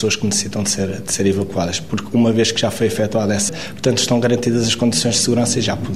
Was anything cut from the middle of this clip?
yes; 1 cut; at 3.5 s

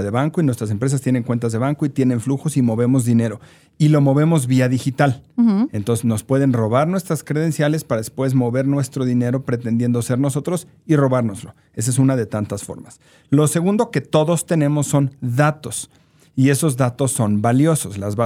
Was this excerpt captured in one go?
yes; 0 cuts

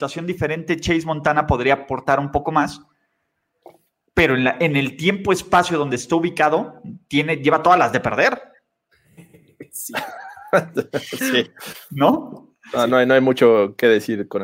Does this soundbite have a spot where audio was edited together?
no; 0 cuts

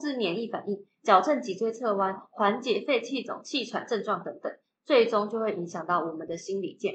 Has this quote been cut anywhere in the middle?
no; 0 cuts

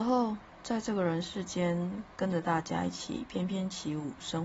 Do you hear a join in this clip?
no; 0 cuts

